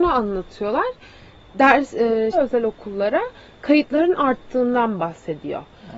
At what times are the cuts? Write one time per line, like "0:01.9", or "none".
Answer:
0:02.3